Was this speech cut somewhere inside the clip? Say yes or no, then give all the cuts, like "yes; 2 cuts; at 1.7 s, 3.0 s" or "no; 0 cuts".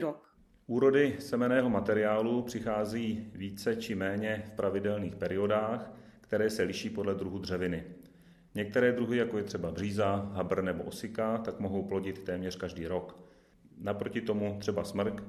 no; 0 cuts